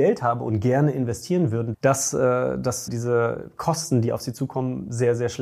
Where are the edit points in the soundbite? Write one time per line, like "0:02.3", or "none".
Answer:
0:01.7
0:02.9